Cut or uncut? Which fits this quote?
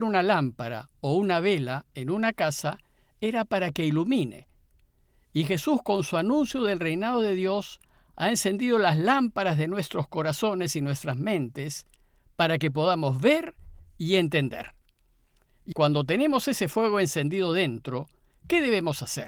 cut